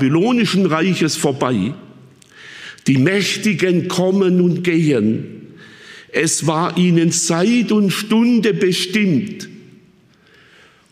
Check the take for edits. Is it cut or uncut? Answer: uncut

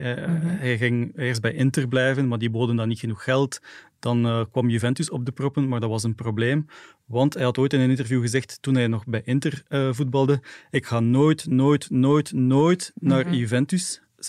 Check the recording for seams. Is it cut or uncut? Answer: uncut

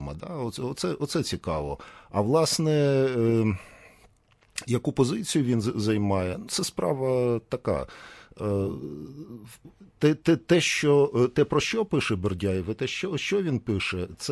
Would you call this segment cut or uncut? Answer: cut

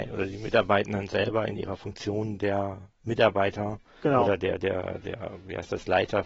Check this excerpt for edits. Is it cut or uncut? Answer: uncut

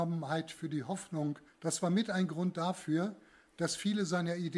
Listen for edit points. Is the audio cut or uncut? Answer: cut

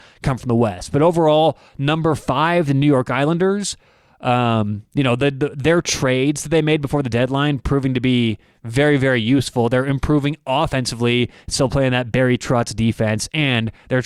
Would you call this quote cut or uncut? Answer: uncut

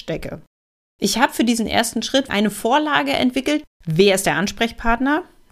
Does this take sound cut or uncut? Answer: cut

